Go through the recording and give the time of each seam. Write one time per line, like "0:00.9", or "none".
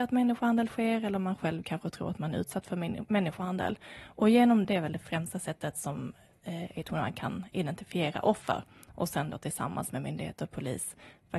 0:04.6